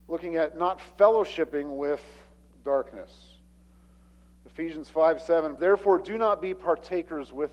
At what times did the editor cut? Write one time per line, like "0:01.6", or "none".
0:05.6